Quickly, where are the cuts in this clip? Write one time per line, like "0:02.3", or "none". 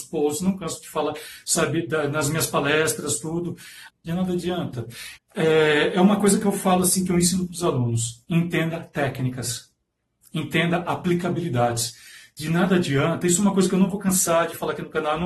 0:03.9
0:05.2